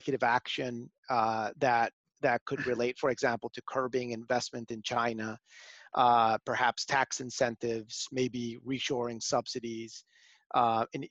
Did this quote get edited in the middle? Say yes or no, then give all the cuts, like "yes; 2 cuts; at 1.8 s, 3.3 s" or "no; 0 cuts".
no; 0 cuts